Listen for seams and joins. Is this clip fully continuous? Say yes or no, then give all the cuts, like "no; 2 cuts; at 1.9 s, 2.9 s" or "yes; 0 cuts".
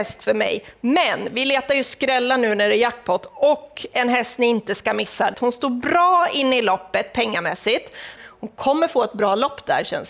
no; 2 cuts; at 5.3 s, 8.2 s